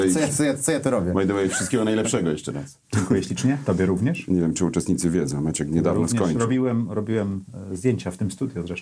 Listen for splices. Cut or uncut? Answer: uncut